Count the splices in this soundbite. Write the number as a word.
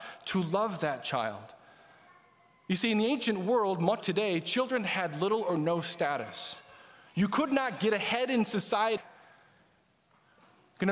two